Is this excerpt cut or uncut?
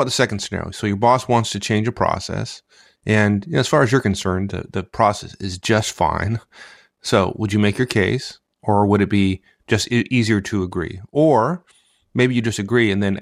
uncut